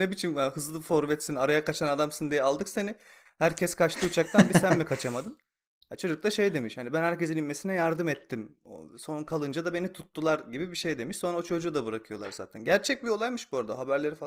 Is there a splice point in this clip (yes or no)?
no